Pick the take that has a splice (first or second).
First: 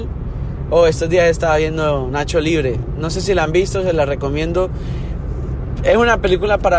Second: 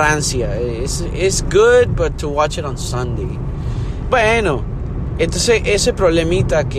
second